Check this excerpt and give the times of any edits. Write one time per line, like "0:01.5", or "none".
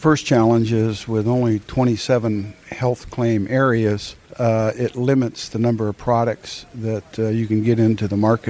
0:04.2